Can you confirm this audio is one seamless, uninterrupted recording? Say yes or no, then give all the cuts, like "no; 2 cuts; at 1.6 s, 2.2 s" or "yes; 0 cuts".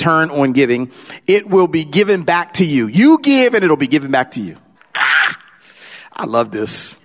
no; 1 cut; at 4.7 s